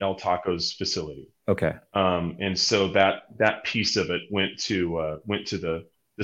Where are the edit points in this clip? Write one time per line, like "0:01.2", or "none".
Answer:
none